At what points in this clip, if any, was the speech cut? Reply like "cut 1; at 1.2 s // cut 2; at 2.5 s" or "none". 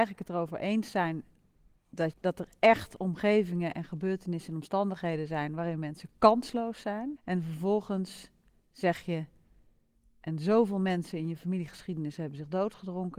cut 1; at 2.1 s // cut 2; at 7.2 s